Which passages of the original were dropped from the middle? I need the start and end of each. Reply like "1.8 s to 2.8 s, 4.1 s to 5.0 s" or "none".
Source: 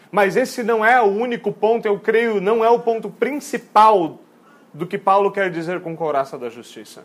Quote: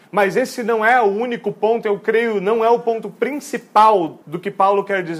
4.2 s to 4.7 s